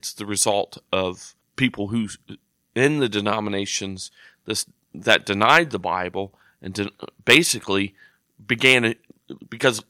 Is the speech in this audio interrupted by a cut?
no; 0 cuts

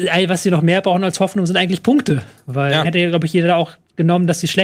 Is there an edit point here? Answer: yes; 1 cut; at 2.8 s

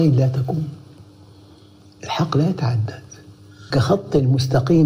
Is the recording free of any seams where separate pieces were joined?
no; 1 cut; at 3.7 s

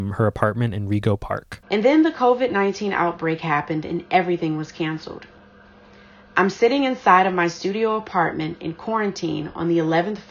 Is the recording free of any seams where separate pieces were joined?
no; 1 cut; at 1.6 s

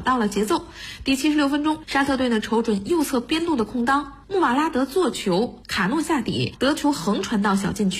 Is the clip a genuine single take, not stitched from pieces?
yes; 0 cuts

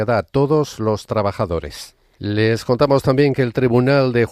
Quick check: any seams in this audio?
yes; 1 cut; at 2.2 s

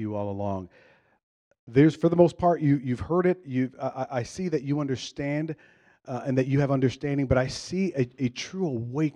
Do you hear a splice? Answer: no; 0 cuts

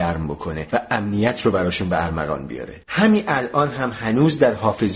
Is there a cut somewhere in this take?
yes; 1 cut; at 2.8 s

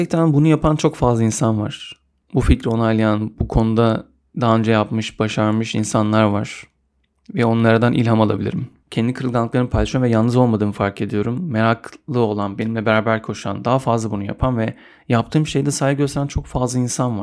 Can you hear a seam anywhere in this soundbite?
yes; 1 cut; at 8.8 s

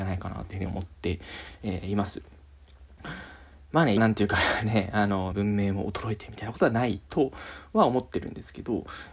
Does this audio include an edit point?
yes; 2 cuts; at 4.0 s, 5.3 s

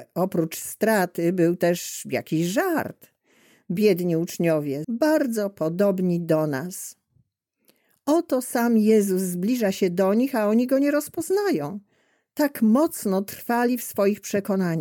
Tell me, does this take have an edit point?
yes; 1 cut; at 4.8 s

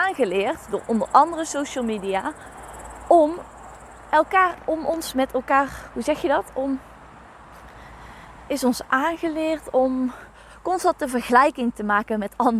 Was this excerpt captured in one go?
no; 1 cut; at 8.5 s

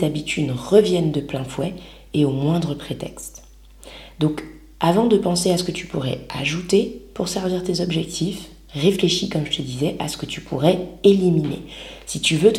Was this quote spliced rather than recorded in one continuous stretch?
no; 0 cuts

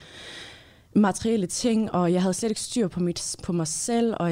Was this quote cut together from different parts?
no; 0 cuts

